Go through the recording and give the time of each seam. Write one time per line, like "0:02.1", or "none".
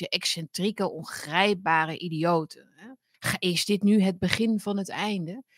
0:03.1